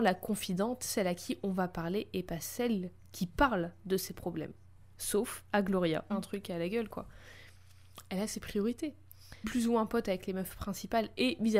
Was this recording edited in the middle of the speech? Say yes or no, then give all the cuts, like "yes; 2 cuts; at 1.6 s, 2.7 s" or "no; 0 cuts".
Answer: yes; 2 cuts; at 6.1 s, 9.4 s